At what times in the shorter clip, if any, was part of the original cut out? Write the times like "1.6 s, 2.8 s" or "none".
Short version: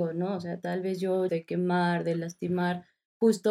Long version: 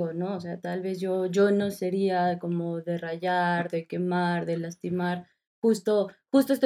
1.3 s